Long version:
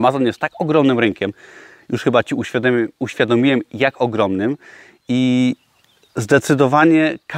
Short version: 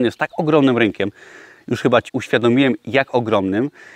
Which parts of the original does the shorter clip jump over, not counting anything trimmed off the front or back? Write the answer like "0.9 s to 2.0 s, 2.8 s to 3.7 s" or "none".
2.3 s to 2.9 s

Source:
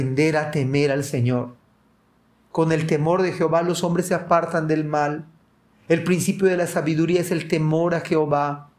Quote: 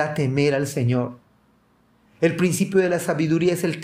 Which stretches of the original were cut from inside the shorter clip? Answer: 2.4 s to 5.7 s

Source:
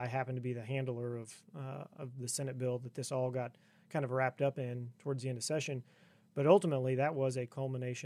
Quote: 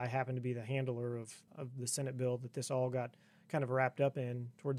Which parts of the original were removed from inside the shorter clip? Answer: 1.5 s to 1.9 s

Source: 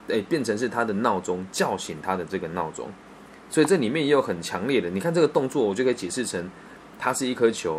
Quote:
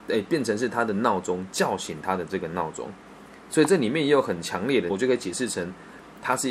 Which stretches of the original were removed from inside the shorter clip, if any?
4.9 s to 5.7 s

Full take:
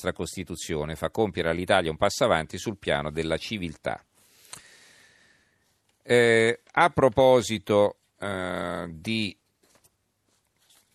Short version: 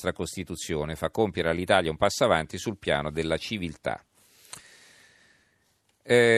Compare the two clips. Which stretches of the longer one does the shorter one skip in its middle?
none

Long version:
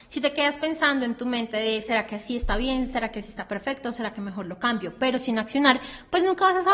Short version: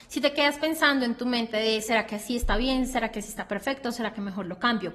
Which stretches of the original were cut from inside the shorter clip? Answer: none

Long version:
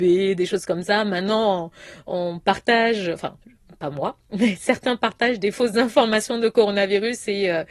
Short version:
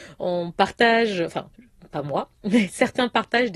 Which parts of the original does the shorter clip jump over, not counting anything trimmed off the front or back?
none

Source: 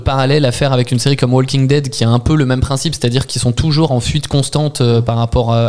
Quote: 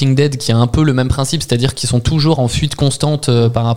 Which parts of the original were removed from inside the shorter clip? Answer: none

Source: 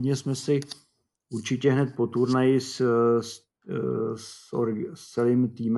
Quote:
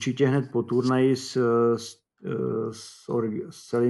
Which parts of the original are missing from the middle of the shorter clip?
none

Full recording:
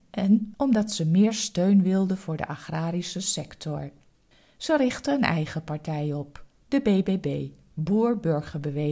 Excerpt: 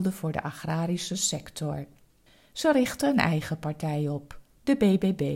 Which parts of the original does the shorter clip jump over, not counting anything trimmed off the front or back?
none

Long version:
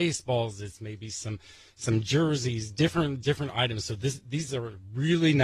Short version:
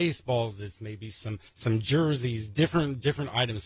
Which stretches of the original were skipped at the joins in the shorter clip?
1.5 s to 1.7 s

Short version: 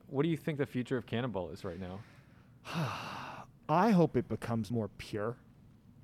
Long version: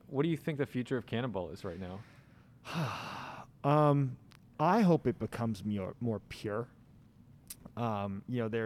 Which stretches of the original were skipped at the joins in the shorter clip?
3.6 s to 4.5 s, 5.6 s to 6.0 s

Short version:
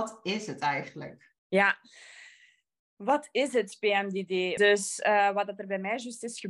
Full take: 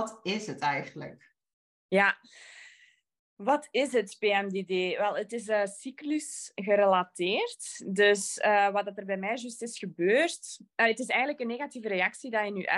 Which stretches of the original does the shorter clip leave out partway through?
1.4 s to 1.8 s, 5.0 s to 8.0 s

